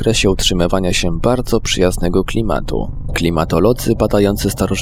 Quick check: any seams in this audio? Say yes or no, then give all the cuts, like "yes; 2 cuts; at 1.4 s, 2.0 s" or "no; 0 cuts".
yes; 1 cut; at 3.1 s